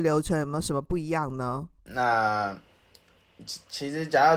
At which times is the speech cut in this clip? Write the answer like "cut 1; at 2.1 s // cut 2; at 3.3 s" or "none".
cut 1; at 1.8 s